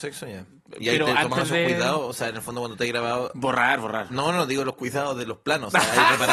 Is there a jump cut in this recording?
no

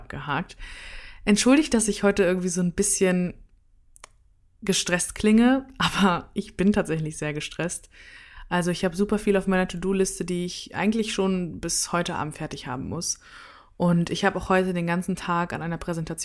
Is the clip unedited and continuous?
yes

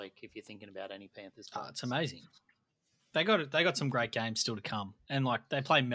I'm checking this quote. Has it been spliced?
no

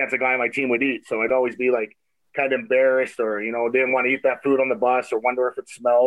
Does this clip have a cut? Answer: no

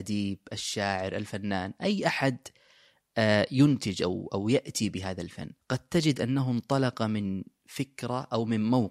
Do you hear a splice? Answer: yes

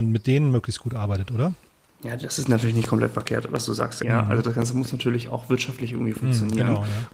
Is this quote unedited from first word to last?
no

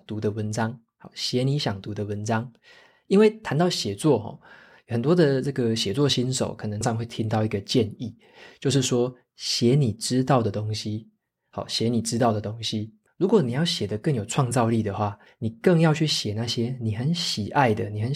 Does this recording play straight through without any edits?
no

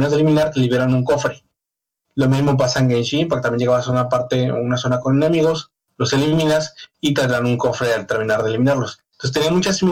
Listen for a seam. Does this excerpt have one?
no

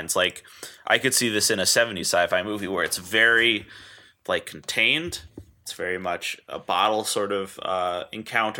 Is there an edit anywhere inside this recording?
no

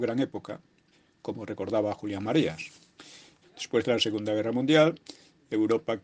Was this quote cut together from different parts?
yes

